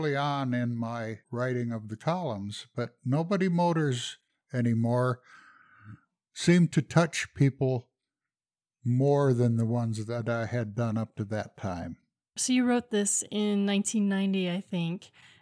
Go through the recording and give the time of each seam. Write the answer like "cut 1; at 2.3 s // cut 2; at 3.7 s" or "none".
cut 1; at 1.2 s // cut 2; at 12.3 s